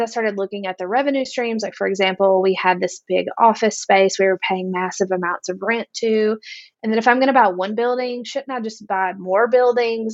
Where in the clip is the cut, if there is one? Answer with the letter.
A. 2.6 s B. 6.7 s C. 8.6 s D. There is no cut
B